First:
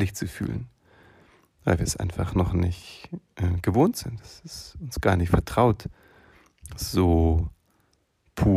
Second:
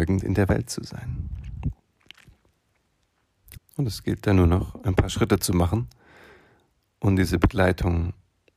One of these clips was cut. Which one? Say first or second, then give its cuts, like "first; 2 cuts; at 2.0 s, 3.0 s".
second; 1 cut; at 3.5 s